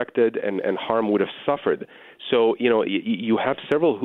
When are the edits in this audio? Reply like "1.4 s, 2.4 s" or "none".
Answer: none

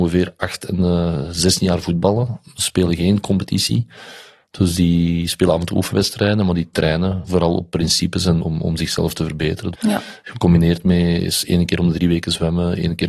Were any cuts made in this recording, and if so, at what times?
8.4 s, 9.7 s

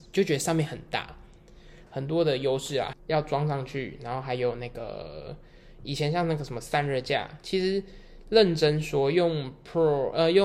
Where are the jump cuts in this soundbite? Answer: 1.9 s, 2.9 s

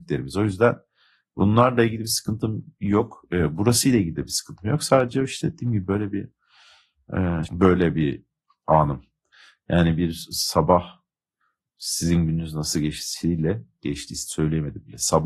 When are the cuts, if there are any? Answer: 7.5 s

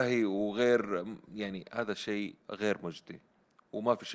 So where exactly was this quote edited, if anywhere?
2.4 s

